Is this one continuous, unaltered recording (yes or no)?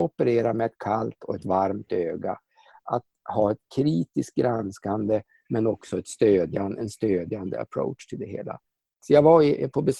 no